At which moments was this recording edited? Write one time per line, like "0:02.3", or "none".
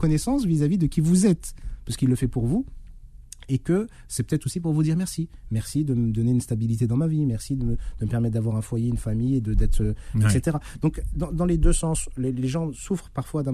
none